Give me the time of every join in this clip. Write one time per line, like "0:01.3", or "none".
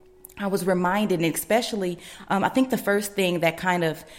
none